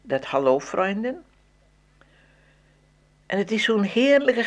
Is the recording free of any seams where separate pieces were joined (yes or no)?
yes